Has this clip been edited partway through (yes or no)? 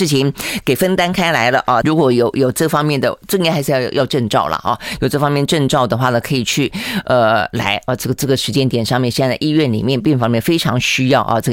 yes